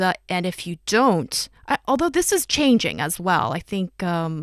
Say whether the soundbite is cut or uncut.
uncut